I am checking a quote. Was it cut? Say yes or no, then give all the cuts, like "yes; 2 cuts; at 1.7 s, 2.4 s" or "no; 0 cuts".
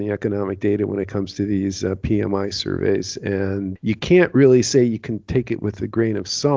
yes; 1 cut; at 3.8 s